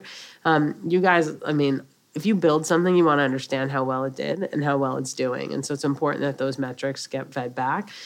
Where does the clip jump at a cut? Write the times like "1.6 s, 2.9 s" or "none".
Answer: none